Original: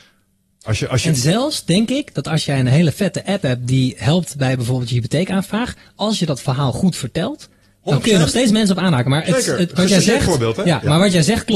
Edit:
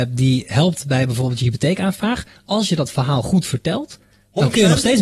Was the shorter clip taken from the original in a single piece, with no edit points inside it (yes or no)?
yes